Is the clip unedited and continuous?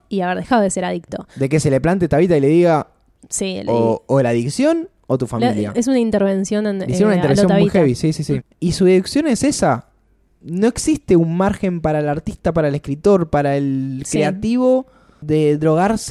no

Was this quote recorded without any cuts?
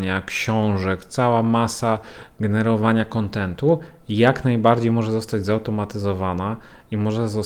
yes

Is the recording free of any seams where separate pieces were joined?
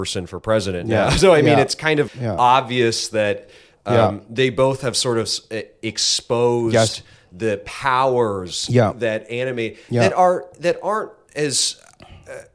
no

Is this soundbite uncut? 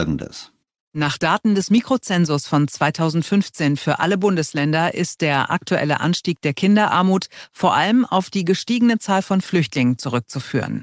yes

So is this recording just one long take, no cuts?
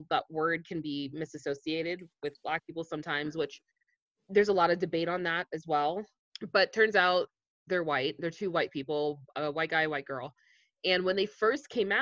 no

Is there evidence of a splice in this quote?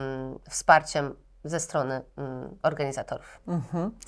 no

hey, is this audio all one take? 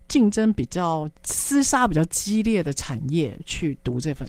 no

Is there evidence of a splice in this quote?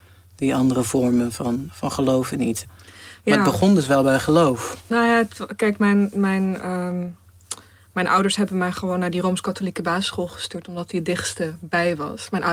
yes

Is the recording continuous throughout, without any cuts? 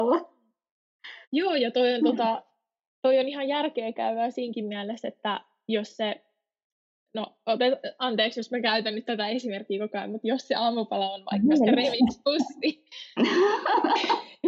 no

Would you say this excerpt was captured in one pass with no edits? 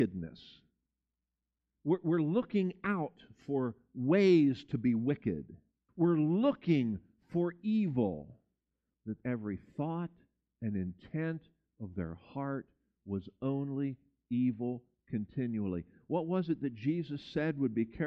no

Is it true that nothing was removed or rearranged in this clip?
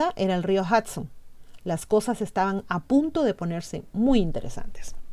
yes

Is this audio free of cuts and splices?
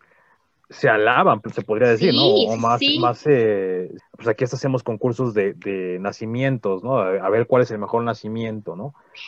no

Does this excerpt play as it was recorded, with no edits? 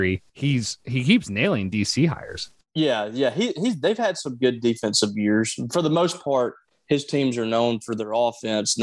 yes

